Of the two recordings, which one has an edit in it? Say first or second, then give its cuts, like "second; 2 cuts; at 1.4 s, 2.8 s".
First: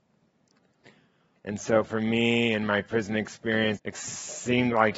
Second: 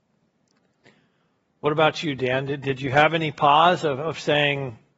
first; 2 cuts; at 1.4 s, 3.8 s